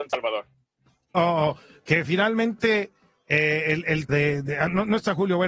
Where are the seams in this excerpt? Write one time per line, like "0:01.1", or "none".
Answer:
0:01.1
0:04.1